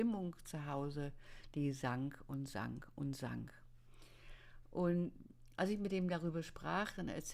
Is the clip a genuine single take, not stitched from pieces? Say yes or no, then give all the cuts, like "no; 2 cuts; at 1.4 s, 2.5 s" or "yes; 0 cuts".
yes; 0 cuts